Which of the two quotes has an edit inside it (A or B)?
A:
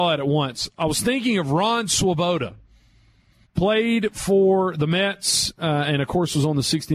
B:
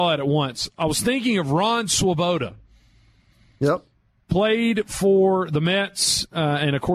A